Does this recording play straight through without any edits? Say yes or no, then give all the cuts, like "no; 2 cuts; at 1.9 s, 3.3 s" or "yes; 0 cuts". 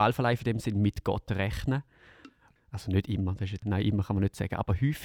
no; 2 cuts; at 2.6 s, 3.6 s